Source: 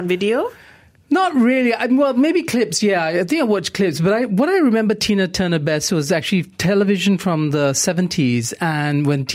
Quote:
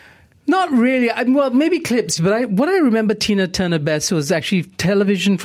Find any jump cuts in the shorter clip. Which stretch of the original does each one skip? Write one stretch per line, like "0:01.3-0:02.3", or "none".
0:02.8-0:04.0